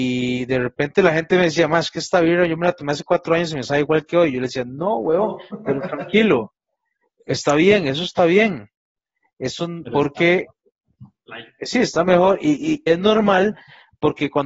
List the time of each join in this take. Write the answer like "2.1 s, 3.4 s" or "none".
9.8 s, 12.9 s